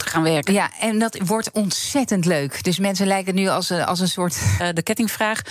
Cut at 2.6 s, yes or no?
no